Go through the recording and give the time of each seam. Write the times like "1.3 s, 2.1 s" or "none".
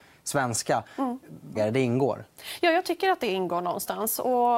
1.6 s